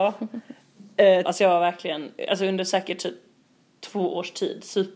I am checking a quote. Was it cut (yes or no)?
yes